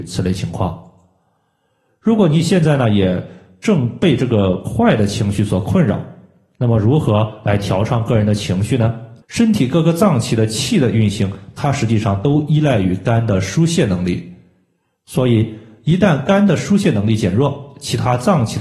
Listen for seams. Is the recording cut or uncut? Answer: cut